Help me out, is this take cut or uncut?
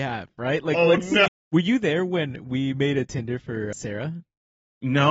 cut